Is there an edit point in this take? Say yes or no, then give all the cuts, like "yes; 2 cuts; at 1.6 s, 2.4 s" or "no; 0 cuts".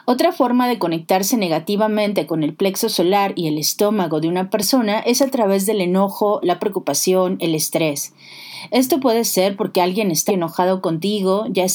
yes; 2 cuts; at 6.4 s, 10.3 s